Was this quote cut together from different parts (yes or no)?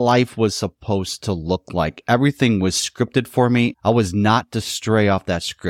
no